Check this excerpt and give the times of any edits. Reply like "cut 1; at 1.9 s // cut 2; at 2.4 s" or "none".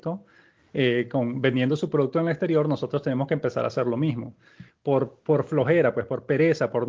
cut 1; at 4.7 s